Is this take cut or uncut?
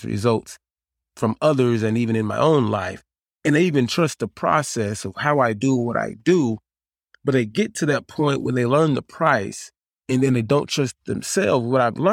uncut